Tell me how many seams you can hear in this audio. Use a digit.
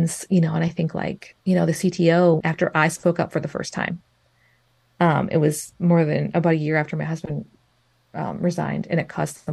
2